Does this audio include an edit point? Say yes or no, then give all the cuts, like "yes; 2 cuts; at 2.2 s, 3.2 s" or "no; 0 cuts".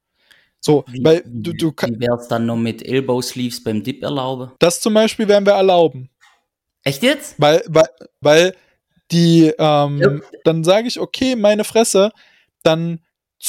yes; 3 cuts; at 4.6 s, 8.2 s, 10.4 s